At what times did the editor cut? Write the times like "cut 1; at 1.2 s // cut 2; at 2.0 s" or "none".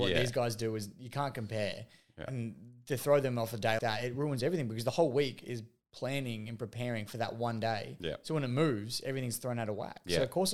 cut 1; at 3.8 s